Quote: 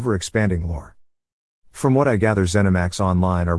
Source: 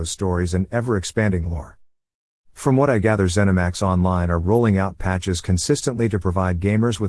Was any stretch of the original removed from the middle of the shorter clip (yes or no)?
no